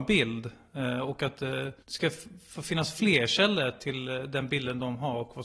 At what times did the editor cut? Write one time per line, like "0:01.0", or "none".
0:01.8